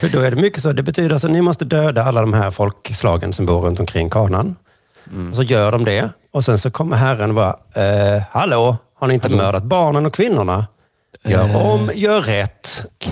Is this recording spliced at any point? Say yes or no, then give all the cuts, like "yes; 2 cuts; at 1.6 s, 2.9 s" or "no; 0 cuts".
no; 0 cuts